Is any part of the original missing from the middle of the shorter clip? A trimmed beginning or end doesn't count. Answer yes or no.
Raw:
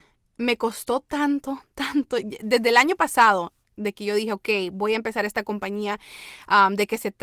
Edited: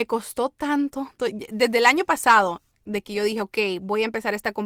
yes